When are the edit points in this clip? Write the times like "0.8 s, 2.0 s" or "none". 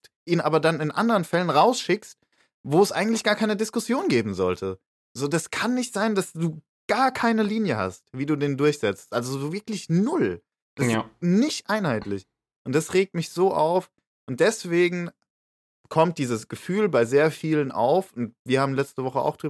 none